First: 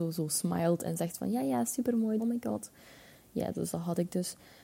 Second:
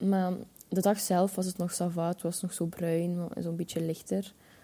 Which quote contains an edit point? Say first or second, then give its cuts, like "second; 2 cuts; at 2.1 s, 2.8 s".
first; 1 cut; at 2.2 s